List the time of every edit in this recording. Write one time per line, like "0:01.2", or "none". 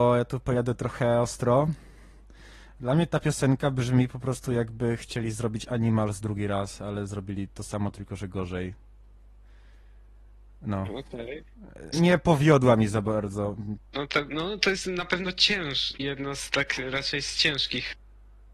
0:11.9
0:13.8
0:16.0